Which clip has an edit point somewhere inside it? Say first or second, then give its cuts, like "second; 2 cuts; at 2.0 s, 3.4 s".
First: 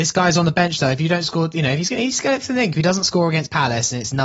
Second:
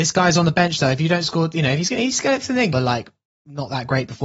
second; 1 cut; at 2.7 s